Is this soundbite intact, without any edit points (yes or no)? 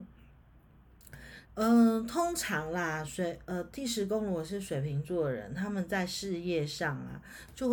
no